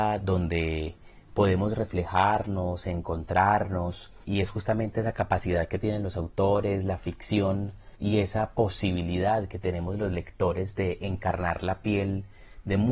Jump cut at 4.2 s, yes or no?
yes